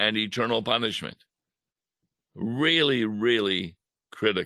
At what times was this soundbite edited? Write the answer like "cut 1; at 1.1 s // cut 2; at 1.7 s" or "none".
none